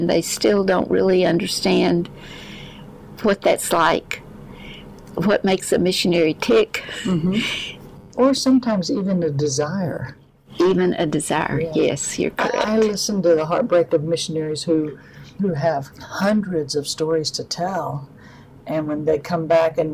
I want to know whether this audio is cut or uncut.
cut